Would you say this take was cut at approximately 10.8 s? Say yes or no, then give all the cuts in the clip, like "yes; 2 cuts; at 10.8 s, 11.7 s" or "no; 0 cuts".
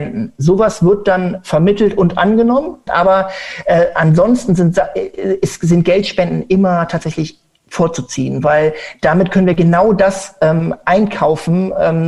no; 1 cut; at 2.9 s